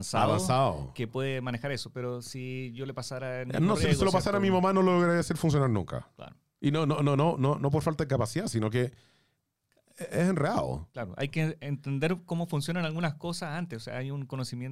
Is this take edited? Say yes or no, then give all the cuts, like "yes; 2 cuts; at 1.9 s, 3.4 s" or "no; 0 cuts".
no; 0 cuts